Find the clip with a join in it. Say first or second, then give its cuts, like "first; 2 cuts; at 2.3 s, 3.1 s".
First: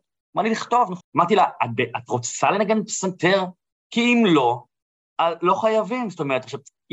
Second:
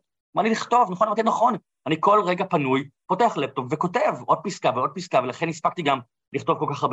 first; 1 cut; at 1.0 s